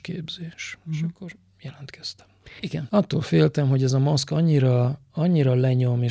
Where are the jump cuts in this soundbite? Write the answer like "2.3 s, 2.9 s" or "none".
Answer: 2.6 s